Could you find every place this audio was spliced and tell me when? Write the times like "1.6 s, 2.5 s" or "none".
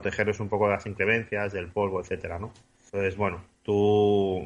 2.9 s